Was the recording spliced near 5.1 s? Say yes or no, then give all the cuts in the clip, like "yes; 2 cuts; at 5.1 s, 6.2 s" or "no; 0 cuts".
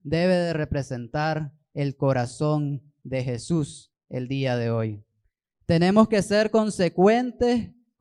no; 0 cuts